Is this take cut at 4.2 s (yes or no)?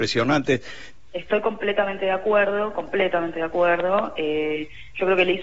no